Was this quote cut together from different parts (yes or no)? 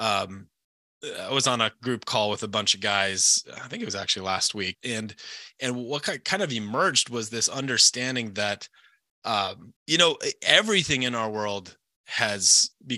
yes